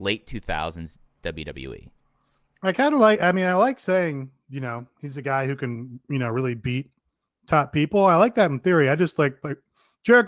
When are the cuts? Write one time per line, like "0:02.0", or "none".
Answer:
none